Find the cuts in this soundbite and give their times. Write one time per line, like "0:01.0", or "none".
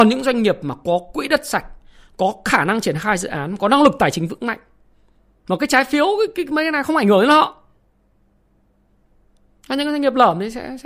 0:05.3